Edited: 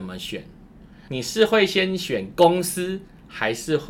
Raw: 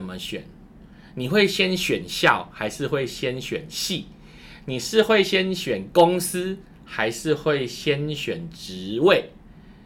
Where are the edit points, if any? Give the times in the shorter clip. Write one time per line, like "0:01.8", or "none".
0:01.1